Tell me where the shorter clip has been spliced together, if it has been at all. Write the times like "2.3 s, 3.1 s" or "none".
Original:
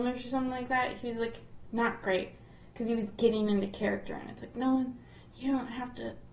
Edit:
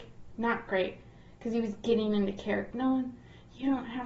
2.7 s